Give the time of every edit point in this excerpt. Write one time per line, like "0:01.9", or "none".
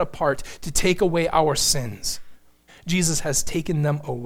0:02.7